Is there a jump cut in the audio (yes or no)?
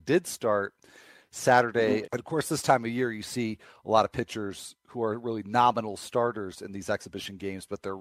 yes